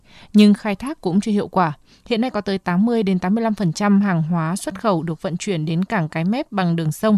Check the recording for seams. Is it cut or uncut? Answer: cut